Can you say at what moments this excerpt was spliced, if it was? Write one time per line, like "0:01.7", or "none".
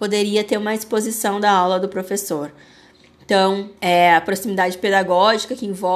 0:03.8